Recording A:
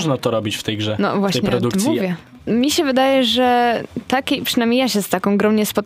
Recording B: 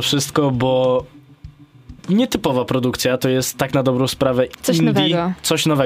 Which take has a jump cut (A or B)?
A